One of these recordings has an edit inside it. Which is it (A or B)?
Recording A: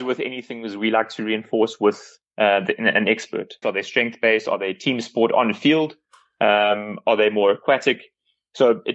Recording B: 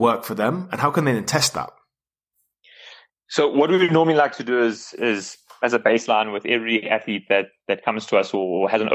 A